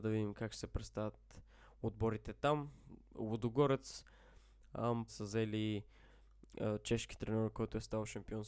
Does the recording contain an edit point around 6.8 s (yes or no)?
no